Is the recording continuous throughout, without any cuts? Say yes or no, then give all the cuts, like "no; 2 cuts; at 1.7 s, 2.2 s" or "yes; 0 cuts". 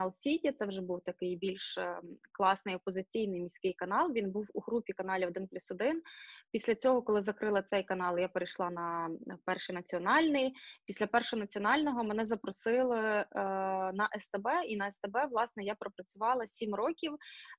yes; 0 cuts